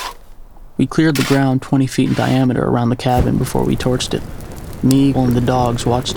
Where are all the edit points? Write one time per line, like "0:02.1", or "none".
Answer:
0:05.1

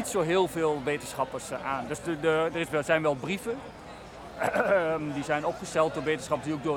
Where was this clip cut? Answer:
none

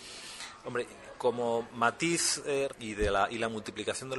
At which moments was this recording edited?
0:01.2
0:02.7

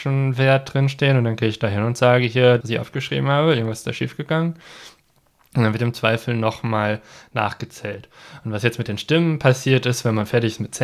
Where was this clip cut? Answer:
0:02.6

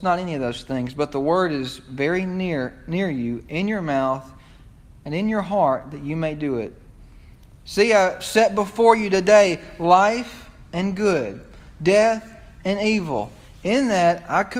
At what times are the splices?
none

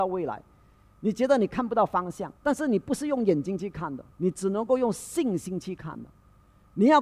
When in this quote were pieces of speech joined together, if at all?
0:02.4
0:04.1

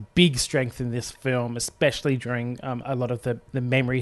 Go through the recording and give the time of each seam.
0:02.8

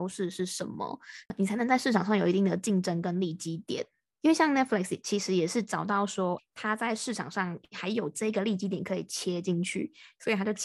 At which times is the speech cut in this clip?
0:04.1
0:06.4

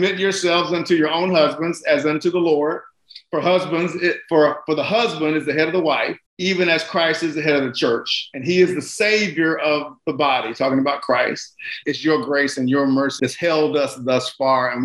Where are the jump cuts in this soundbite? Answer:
0:06.3
0:11.8
0:13.2

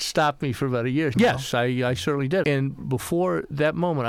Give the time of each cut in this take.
0:01.1
0:02.4

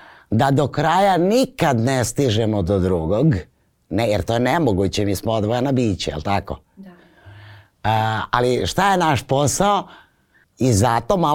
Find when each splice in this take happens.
0:10.4

